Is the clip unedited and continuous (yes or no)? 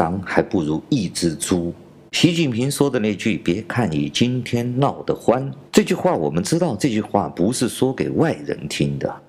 no